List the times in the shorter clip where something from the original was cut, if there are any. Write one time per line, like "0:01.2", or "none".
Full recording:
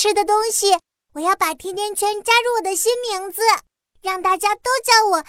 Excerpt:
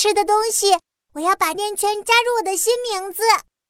0:01.5

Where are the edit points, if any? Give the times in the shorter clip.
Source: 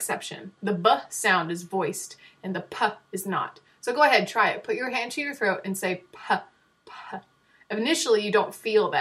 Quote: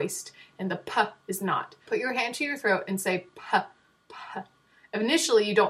0:01.9

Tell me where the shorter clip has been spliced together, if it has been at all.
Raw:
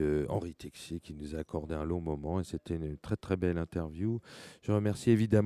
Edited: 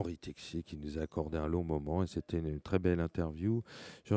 0:02.6

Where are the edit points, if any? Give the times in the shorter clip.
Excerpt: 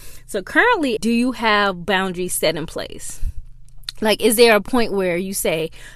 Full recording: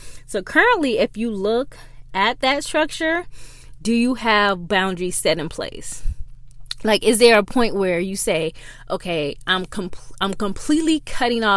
0:01.0

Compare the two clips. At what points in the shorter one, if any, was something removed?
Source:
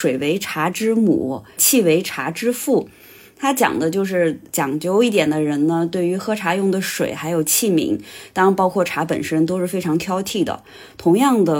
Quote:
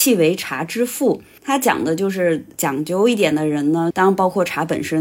0:01.4
0:03.9

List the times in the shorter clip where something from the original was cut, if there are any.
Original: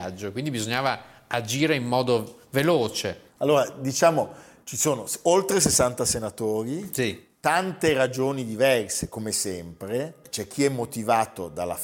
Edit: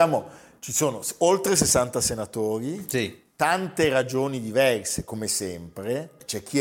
none

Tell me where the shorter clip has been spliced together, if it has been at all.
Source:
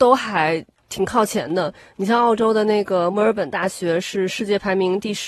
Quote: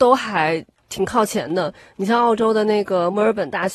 none

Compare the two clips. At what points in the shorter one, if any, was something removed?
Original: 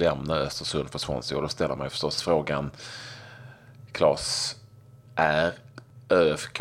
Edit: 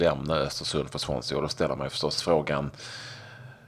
none

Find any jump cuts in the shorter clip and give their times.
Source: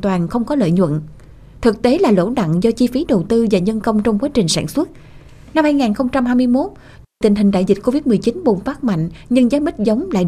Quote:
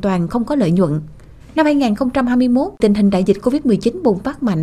0:01.4
0:02.8

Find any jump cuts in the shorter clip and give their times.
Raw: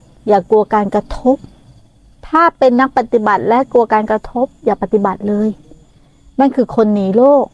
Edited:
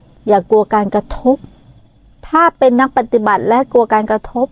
none

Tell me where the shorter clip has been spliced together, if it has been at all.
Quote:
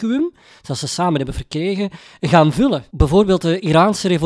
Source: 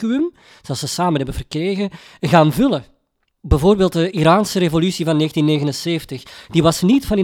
0:02.9

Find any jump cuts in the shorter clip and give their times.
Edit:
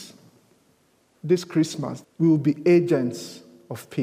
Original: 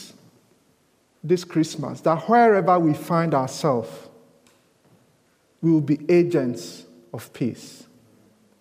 0:02.0

